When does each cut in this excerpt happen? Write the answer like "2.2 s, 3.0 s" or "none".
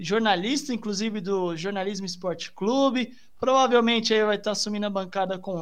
none